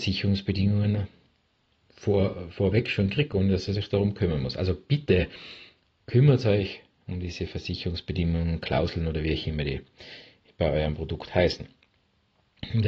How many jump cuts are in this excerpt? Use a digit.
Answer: 0